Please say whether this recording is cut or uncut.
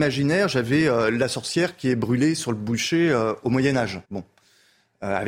cut